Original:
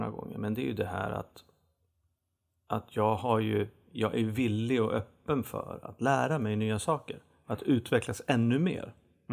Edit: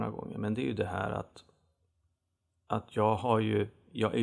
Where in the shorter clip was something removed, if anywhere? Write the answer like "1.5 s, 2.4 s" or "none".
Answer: none